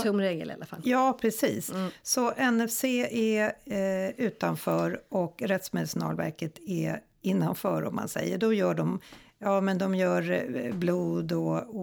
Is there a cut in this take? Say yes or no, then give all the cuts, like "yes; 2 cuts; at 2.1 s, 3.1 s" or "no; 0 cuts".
no; 0 cuts